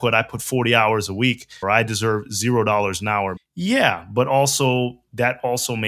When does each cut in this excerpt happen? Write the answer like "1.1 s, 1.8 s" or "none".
1.6 s, 3.4 s